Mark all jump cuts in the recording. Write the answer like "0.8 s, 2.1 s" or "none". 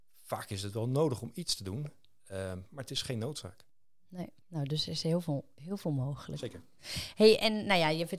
4.4 s